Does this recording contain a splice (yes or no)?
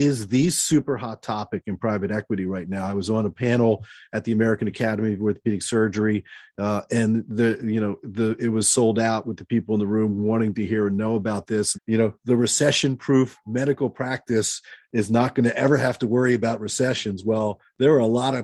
yes